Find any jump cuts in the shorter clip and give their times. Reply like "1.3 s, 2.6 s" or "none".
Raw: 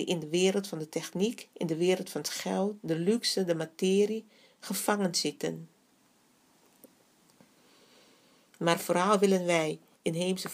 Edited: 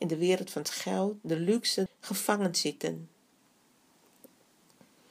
1.9 s